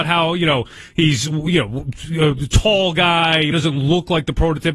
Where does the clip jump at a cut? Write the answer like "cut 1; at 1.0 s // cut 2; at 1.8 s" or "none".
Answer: cut 1; at 3.5 s